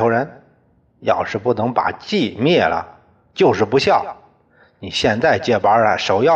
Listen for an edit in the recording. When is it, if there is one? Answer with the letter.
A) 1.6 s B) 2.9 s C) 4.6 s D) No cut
D